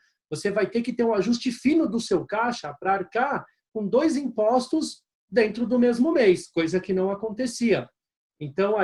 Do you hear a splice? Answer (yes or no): no